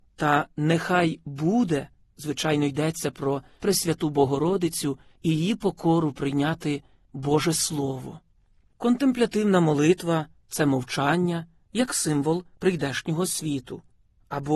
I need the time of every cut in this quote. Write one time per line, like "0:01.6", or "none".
0:02.0

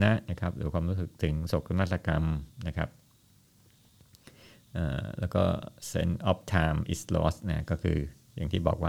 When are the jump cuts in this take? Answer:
none

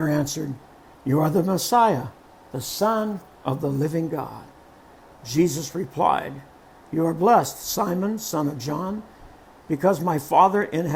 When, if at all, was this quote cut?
none

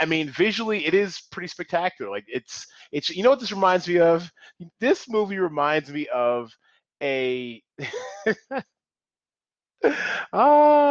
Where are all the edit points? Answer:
none

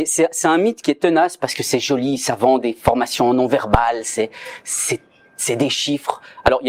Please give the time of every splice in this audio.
none

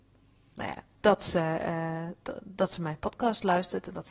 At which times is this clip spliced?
0:01.0

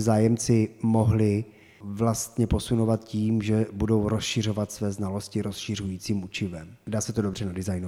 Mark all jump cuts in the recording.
none

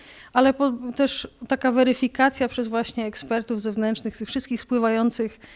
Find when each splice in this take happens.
none

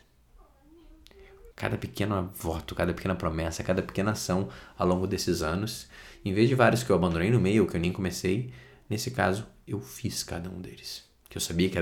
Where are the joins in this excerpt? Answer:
0:01.5

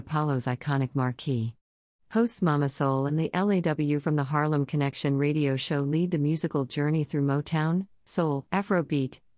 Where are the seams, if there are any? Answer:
0:08.5

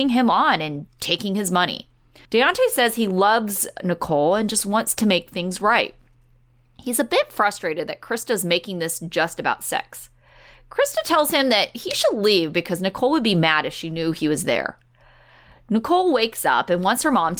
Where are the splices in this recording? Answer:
0:02.2

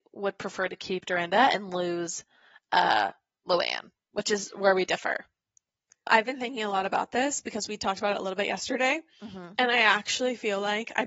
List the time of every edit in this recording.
none

